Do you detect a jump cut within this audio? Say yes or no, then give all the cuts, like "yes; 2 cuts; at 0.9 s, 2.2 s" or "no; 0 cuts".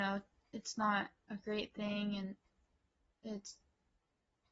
no; 0 cuts